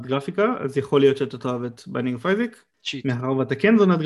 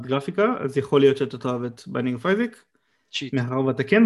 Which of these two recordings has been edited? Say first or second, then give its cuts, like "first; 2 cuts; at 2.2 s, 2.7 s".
first; 1 cut; at 2.7 s